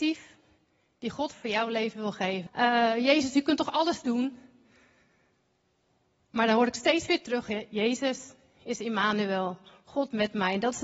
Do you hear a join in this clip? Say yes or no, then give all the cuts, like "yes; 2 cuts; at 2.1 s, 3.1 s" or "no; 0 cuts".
yes; 1 cut; at 2.5 s